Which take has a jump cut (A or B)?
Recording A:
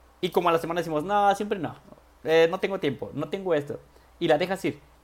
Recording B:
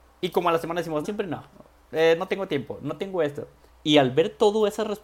B